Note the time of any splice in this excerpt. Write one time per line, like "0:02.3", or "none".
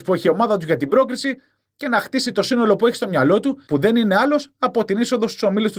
0:03.7